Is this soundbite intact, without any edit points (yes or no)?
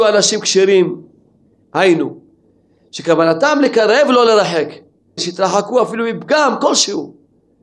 no